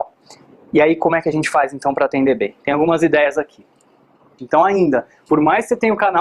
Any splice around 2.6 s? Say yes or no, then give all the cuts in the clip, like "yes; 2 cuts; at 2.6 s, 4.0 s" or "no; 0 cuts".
no; 1 cut; at 4.4 s